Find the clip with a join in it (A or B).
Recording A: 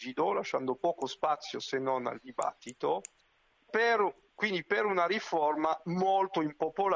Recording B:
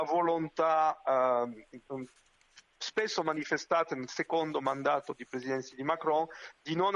A